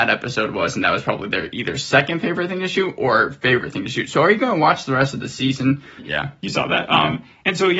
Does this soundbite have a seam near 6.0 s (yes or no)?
yes